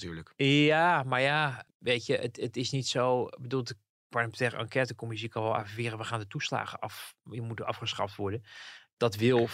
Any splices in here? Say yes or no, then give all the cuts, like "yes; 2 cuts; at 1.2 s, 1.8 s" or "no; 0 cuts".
no; 0 cuts